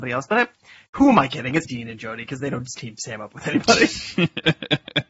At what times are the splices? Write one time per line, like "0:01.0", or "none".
0:01.7

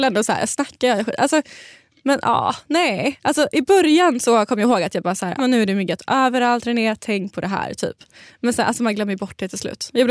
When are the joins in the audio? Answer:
0:05.4

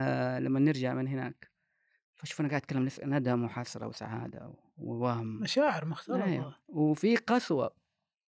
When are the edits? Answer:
none

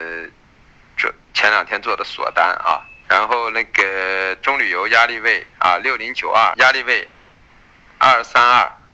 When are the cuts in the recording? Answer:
0:03.0
0:05.5
0:06.5

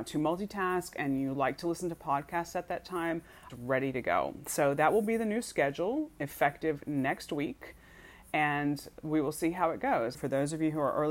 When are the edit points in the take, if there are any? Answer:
0:03.5
0:10.1

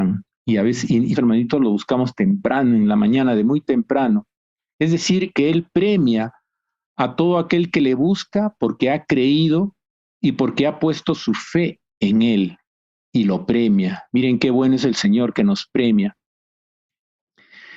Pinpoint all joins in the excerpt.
0:01.1

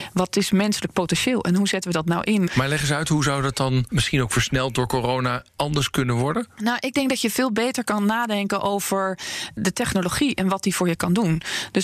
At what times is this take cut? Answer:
0:02.5

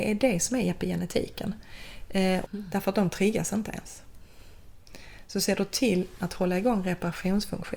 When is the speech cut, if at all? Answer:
0:02.4

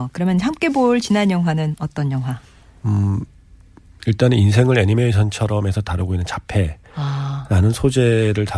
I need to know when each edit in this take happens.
none

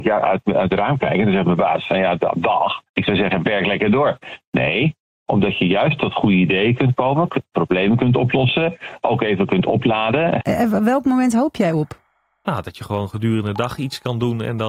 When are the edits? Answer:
0:10.4

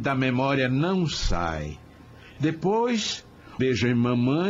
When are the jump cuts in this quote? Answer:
0:03.6

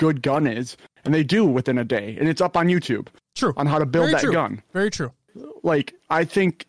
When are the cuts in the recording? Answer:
none

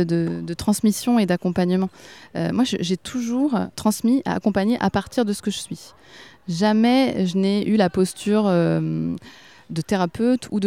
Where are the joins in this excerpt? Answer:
none

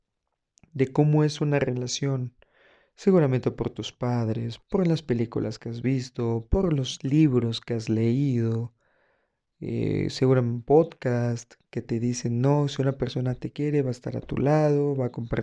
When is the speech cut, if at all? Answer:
0:04.6

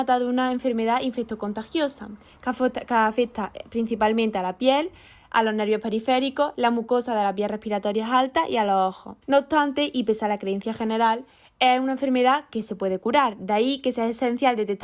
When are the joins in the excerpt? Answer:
0:09.2

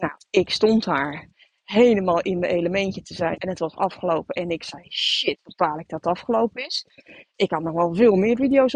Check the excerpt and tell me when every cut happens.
0:03.4

